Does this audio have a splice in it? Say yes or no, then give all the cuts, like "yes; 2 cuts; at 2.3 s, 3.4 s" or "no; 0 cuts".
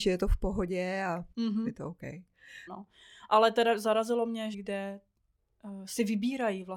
yes; 3 cuts; at 1.3 s, 2.7 s, 4.5 s